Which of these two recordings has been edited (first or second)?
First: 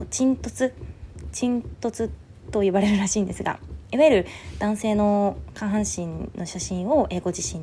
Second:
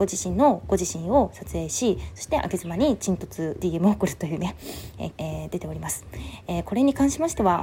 second